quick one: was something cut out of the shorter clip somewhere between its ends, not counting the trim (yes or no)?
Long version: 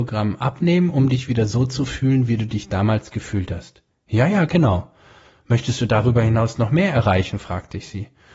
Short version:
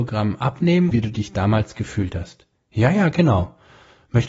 yes